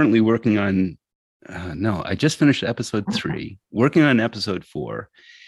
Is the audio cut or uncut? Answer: uncut